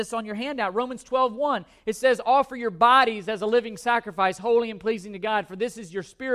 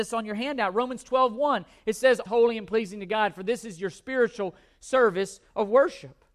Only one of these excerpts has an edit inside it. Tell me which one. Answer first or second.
second